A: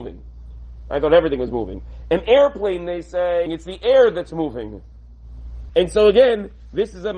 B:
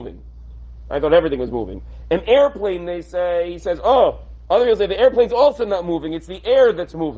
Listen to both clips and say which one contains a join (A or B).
A